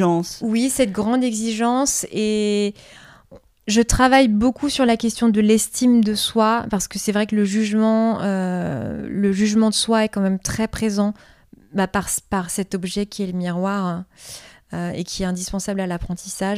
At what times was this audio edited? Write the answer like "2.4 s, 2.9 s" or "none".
none